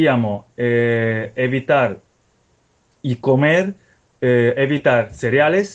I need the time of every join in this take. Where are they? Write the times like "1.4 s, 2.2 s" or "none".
none

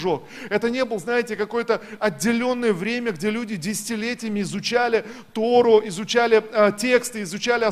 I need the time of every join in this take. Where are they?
none

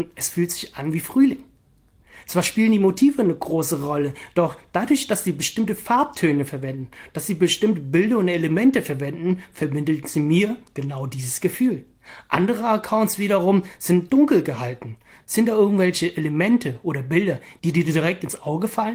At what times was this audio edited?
15.2 s, 17.6 s

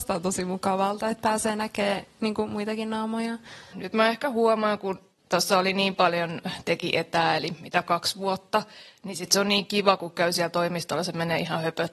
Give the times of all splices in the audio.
3.7 s, 5.2 s

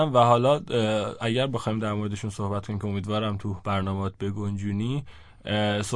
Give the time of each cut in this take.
none

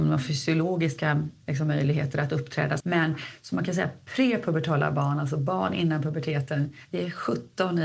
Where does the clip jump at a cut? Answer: 2.8 s

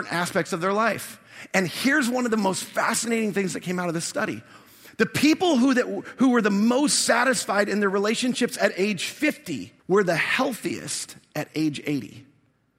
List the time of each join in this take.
9.8 s

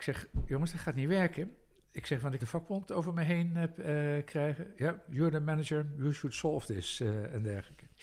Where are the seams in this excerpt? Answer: 2.4 s

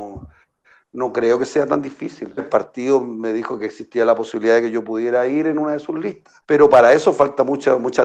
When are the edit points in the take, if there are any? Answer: 2.4 s, 6.4 s

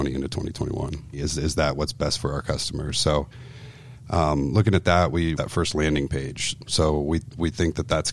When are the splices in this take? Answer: 1.1 s, 5.4 s

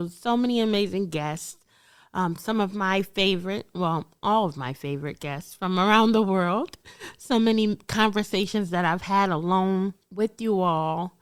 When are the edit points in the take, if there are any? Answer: none

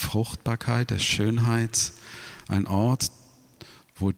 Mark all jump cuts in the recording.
none

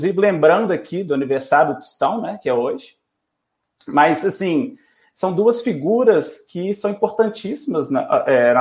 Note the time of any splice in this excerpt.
none

